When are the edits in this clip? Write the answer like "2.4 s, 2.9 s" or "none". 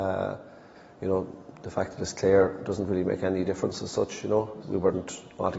4.6 s